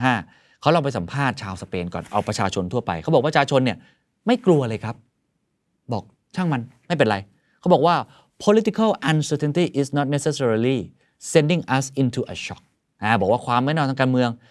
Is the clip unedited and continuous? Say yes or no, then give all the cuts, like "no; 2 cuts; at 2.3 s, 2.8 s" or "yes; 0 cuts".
yes; 0 cuts